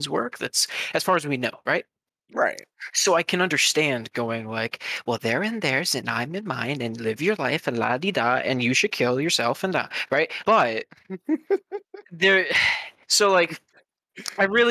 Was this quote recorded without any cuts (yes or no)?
no